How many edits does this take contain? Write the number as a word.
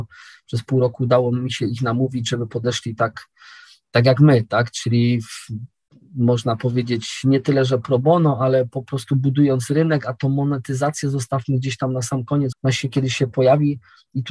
one